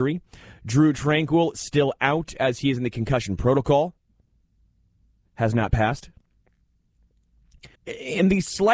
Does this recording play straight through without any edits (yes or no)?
no